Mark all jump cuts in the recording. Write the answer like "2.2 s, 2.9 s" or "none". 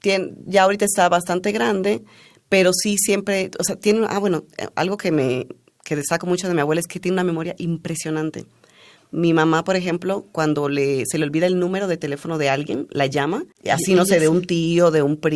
none